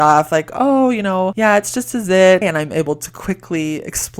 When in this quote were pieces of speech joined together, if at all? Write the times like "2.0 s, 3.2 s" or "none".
2.4 s